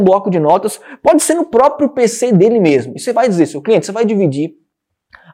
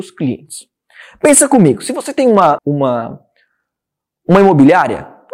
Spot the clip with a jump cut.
second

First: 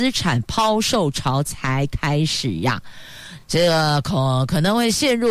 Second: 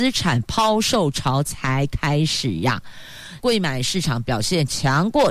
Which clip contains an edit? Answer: second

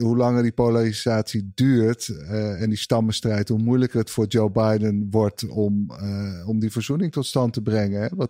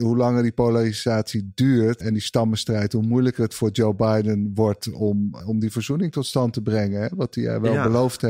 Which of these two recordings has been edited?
second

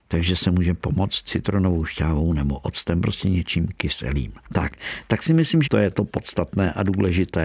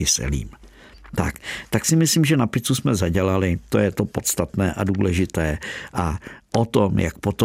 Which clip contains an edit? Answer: first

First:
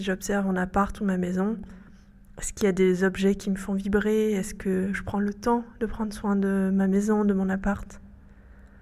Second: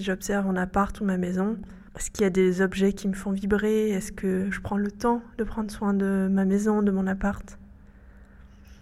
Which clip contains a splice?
second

